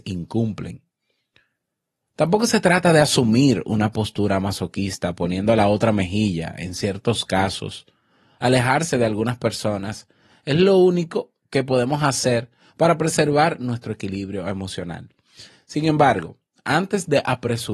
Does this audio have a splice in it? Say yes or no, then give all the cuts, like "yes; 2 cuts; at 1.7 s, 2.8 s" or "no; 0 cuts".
no; 0 cuts